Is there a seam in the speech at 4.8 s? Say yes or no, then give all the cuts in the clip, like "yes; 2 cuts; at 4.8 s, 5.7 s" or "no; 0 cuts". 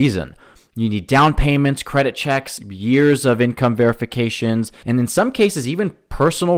yes; 2 cuts; at 2.6 s, 4.8 s